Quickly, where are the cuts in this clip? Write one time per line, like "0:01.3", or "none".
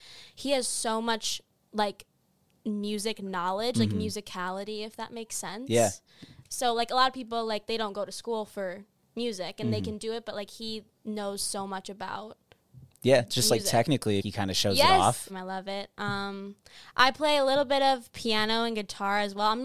0:14.2
0:15.3